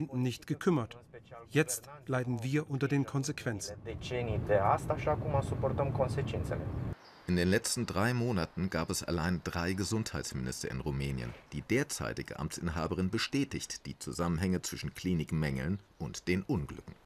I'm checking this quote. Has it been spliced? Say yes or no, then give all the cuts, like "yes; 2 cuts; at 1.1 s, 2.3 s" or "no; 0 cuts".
yes; 1 cut; at 11.5 s